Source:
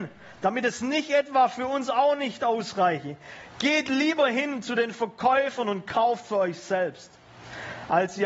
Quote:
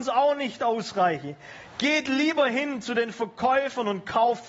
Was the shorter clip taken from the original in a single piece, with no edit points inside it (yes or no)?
yes